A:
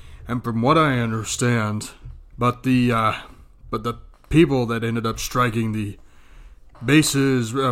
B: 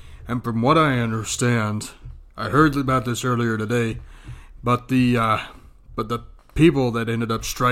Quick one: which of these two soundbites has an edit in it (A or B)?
A